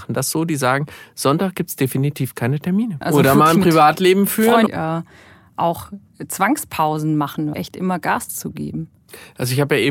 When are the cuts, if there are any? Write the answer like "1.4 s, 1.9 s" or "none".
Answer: 3.0 s, 4.7 s, 7.5 s